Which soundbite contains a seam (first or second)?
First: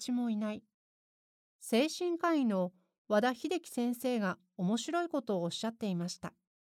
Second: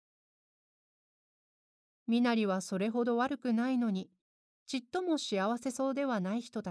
first